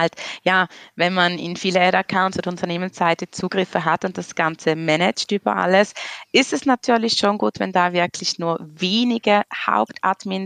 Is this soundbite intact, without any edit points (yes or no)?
yes